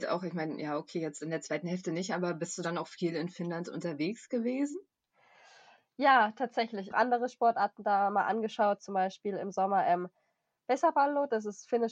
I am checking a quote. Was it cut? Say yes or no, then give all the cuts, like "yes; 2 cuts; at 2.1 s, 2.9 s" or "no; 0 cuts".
yes; 1 cut; at 6.9 s